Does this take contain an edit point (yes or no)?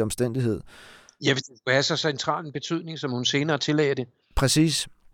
no